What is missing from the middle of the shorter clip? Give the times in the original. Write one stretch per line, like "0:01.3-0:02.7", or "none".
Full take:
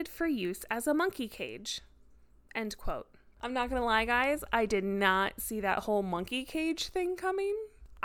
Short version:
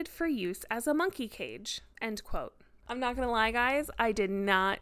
0:01.9-0:02.5